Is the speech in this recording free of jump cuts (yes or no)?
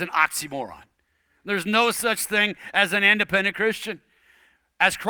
yes